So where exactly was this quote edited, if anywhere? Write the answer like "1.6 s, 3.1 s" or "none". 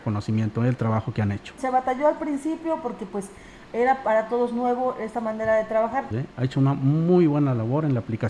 1.6 s, 6.1 s